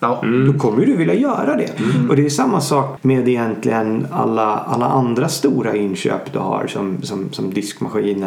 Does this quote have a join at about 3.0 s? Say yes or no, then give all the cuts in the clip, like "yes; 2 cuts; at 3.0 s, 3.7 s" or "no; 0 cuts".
yes; 1 cut; at 3.0 s